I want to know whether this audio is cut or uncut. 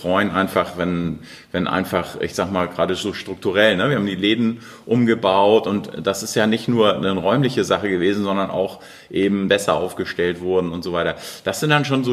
cut